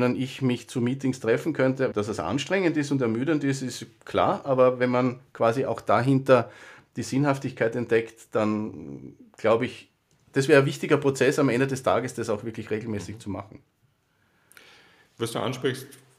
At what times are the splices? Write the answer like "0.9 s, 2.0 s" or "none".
1.9 s